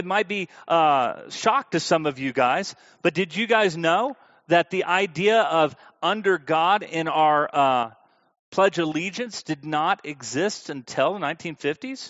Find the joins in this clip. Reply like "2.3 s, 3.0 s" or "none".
none